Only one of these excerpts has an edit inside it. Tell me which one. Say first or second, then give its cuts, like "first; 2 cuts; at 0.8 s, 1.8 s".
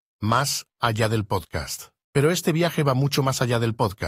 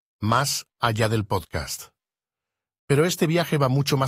first; 1 cut; at 2.0 s